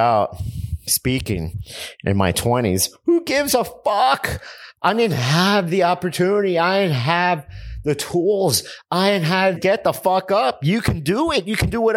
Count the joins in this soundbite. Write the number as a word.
one